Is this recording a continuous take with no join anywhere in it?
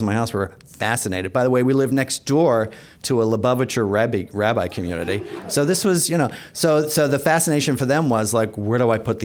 yes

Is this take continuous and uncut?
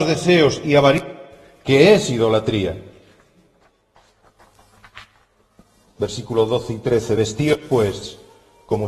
yes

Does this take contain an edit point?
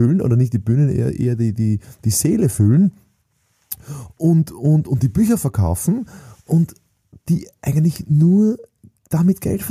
no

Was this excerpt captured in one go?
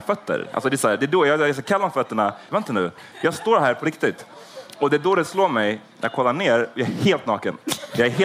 no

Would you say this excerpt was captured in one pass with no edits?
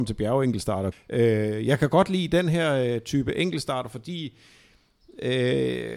no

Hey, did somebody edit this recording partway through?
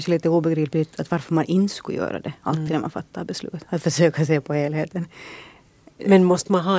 no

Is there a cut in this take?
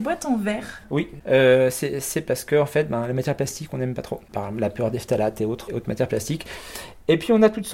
yes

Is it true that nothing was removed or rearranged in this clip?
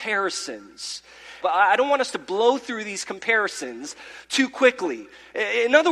no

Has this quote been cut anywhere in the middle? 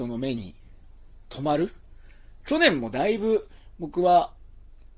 no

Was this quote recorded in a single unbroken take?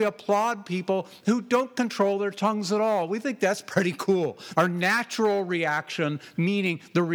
no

